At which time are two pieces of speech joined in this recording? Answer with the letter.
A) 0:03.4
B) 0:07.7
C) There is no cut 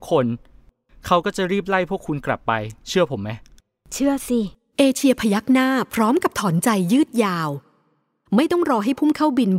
C